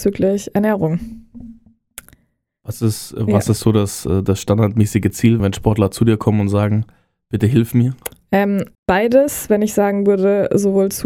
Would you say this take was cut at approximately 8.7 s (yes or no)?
yes